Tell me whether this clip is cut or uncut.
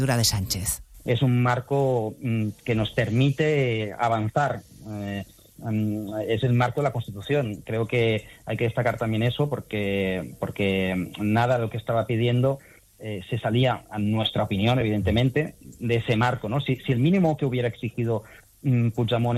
uncut